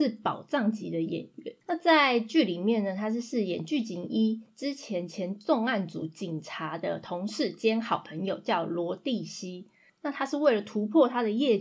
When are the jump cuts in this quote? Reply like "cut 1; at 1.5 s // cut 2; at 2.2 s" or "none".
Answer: cut 1; at 1.6 s // cut 2; at 9.9 s